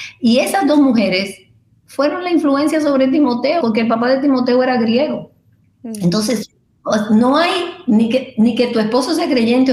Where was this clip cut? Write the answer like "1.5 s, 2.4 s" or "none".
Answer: 3.6 s